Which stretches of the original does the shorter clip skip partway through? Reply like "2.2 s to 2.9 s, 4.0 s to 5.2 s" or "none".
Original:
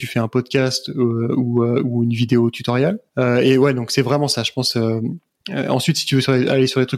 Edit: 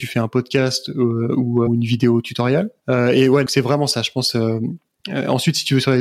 1.7 s to 2.0 s, 3.7 s to 3.9 s